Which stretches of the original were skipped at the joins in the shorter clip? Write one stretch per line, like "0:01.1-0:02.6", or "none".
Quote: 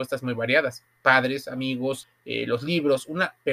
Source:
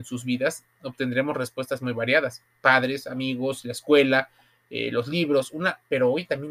0:03.6-0:04.5